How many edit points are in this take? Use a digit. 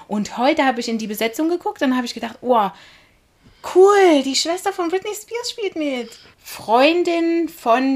1